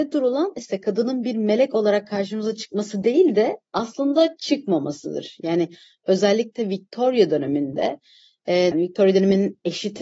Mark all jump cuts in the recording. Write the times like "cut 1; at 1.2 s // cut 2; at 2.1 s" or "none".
cut 1; at 8.7 s